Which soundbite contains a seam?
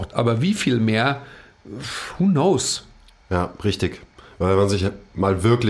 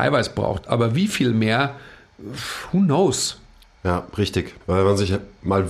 second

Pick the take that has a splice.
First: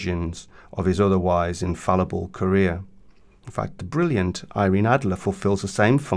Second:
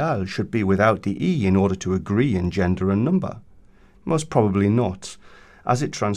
second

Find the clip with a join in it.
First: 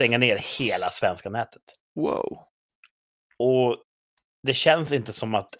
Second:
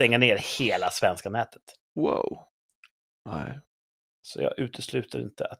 second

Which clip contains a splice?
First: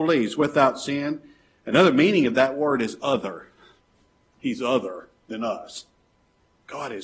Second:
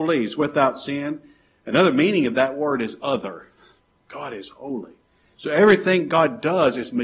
second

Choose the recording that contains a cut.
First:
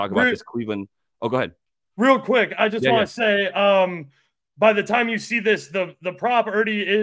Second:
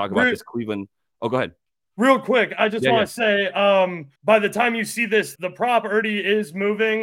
second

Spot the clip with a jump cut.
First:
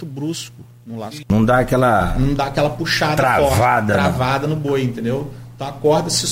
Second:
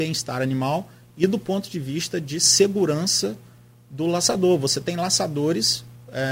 first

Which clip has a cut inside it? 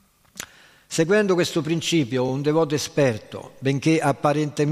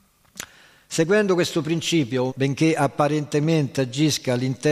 second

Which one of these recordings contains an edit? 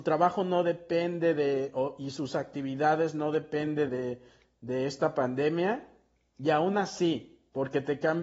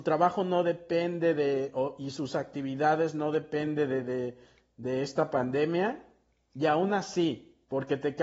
first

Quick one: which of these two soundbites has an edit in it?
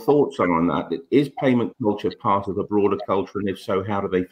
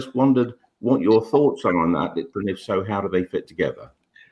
second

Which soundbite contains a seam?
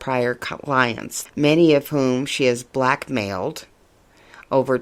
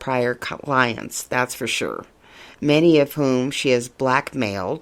first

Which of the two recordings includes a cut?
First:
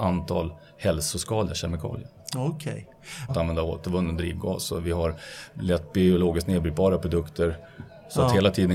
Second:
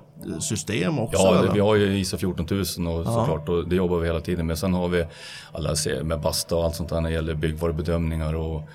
first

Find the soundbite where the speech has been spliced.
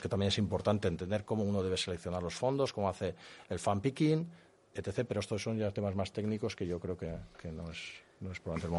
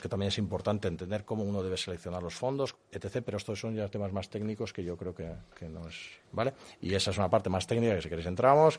second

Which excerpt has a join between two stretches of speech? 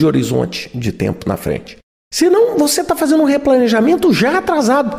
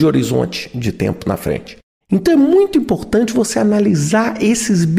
second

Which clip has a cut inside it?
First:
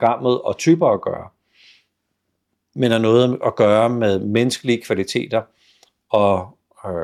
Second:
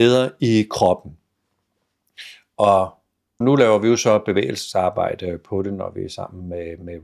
second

